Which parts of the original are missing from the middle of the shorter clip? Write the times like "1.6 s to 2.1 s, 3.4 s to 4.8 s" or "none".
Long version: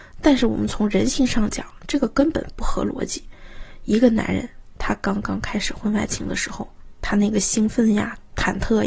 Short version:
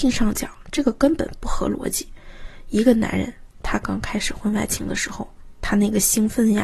5.0 s to 5.2 s